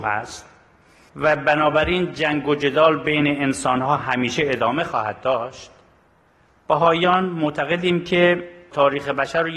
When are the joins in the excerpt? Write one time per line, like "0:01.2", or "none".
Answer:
none